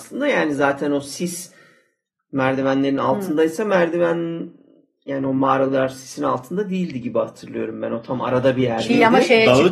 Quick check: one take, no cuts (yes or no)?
yes